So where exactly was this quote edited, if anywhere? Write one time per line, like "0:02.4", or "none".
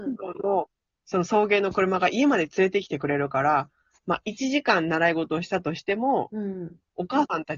none